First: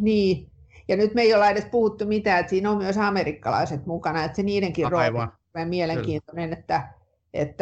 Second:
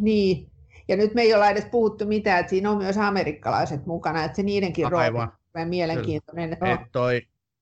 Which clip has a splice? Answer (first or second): second